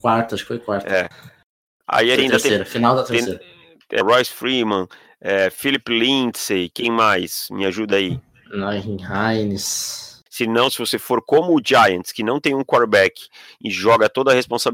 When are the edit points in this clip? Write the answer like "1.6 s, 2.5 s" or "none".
2.2 s, 4.0 s, 10.3 s